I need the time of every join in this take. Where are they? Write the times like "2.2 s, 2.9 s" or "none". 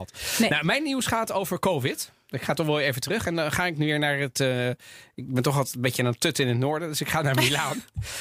none